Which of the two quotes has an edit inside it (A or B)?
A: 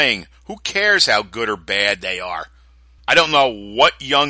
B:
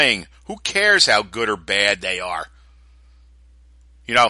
A